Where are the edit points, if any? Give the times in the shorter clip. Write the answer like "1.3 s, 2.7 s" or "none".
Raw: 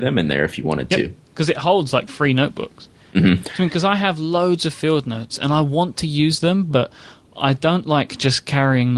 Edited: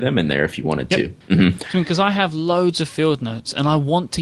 1.2 s